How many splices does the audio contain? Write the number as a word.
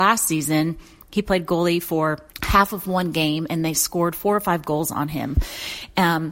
one